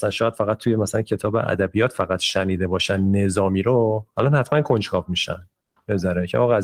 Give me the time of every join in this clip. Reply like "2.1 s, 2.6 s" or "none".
none